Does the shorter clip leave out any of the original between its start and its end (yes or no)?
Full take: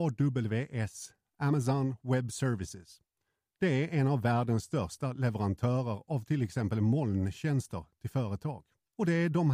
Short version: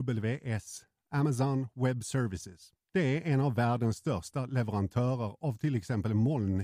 yes